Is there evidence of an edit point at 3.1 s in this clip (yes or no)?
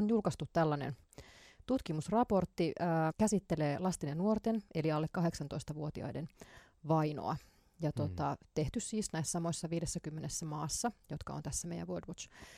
yes